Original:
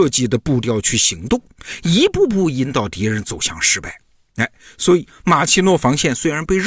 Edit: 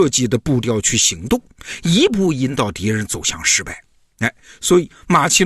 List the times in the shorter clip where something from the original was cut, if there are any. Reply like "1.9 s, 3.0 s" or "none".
2.1 s